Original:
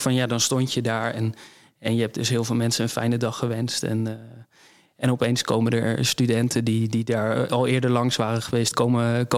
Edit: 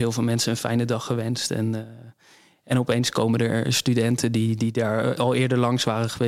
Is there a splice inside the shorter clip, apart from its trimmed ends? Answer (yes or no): no